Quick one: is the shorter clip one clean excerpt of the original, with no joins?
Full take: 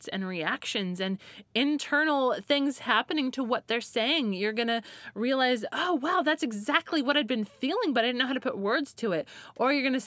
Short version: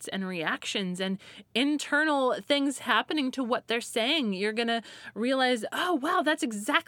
yes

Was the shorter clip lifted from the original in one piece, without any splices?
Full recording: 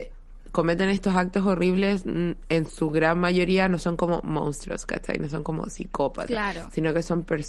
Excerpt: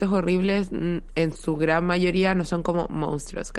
yes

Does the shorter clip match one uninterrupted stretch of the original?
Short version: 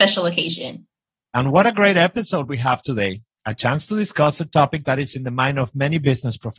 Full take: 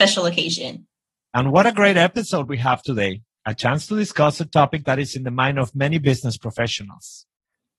yes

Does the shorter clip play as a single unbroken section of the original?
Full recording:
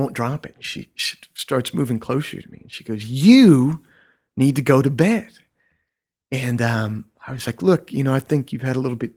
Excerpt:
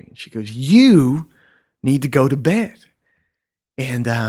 yes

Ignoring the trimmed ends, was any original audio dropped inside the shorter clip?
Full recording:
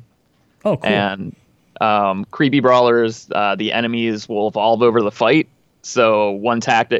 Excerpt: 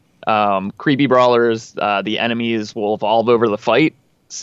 no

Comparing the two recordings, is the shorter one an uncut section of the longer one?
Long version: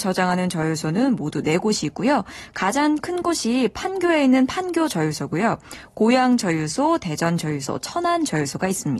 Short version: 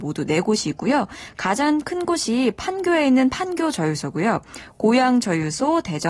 yes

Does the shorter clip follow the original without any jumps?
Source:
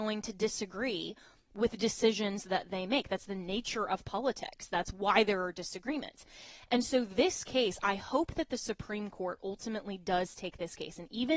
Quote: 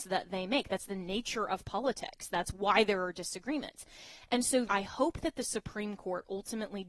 no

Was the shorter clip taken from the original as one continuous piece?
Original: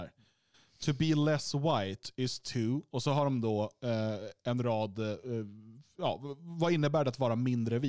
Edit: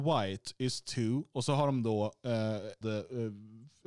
no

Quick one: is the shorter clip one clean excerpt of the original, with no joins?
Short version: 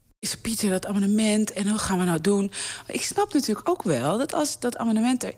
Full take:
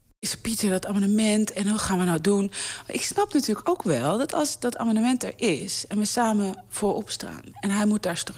yes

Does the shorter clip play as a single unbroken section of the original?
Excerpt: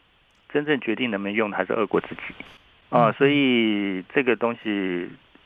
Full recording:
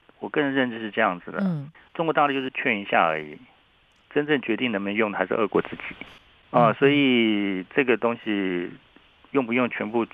yes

